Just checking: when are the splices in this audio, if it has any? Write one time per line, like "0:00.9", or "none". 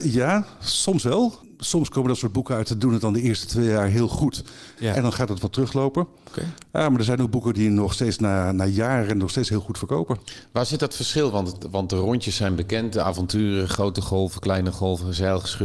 0:04.8